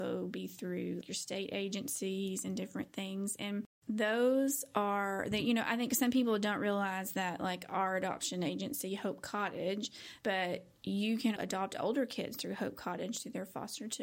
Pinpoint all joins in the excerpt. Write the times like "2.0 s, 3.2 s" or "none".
1.0 s, 10.2 s, 11.4 s